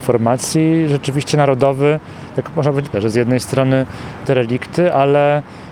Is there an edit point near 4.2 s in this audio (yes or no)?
yes